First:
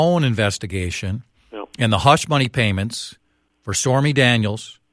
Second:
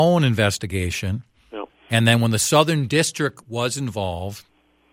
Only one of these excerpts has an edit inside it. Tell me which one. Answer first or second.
second